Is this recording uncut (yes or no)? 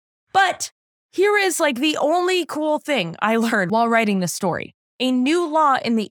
yes